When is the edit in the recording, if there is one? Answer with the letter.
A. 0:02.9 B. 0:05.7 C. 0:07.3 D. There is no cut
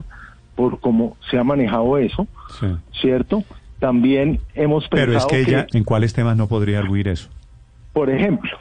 B